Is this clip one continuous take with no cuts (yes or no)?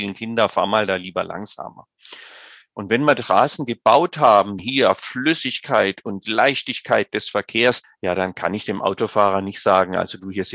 no